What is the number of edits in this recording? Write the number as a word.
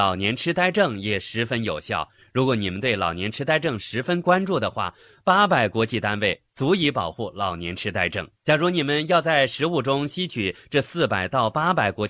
one